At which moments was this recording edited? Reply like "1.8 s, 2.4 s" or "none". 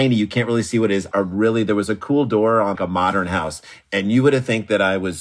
1.1 s, 2.8 s